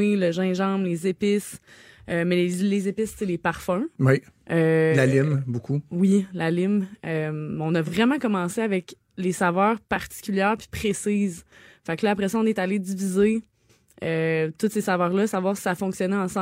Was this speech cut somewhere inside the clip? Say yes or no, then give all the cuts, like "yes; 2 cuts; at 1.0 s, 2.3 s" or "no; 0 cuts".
no; 0 cuts